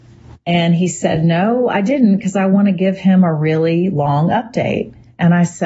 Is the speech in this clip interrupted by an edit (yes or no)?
no